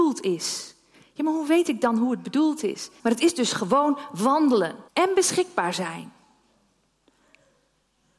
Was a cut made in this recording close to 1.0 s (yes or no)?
no